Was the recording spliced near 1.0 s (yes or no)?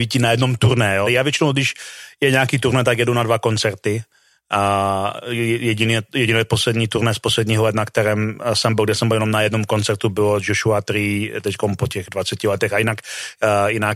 yes